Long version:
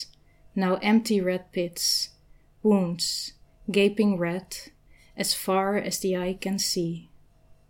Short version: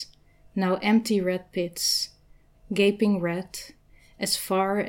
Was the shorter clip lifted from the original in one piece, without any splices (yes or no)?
no